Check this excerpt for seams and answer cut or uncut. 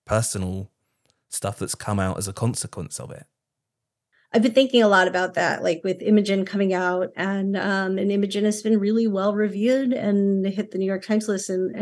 uncut